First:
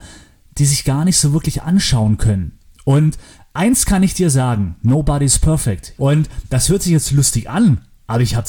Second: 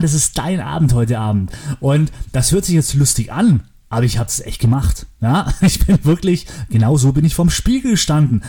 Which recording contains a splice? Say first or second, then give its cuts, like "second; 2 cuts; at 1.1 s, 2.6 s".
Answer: first; 1 cut; at 6.0 s